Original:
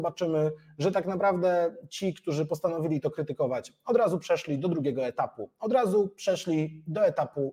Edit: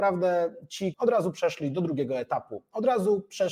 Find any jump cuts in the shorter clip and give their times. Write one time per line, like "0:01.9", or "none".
0:00.9